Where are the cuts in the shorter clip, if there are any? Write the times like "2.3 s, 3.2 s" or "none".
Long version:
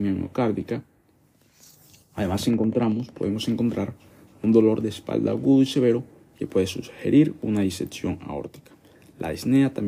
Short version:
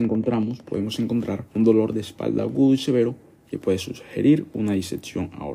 1.5 s

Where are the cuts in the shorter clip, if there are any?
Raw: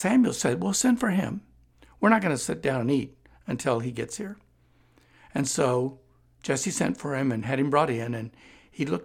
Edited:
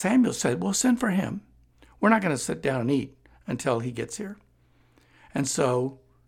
none

